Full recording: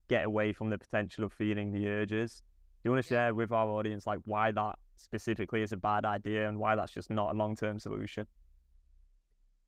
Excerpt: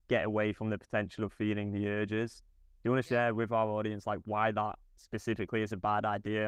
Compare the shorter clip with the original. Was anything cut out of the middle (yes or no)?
no